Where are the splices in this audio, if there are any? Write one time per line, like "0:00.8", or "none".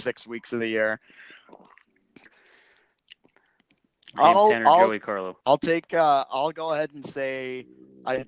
0:02.3
0:05.4